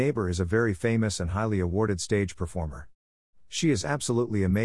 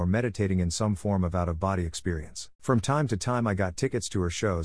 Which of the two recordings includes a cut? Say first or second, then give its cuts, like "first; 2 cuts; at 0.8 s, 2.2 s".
second; 1 cut; at 2.6 s